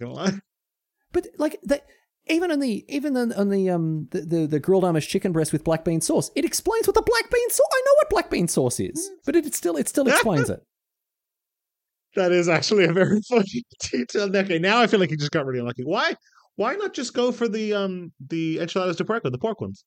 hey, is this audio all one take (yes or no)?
yes